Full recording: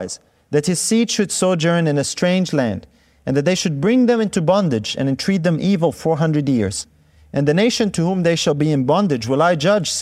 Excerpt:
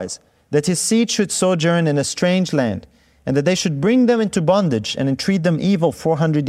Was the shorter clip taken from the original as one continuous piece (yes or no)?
yes